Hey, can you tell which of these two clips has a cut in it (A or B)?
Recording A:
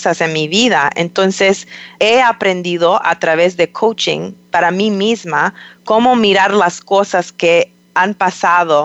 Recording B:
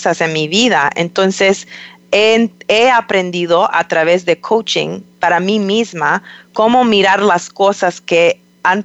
A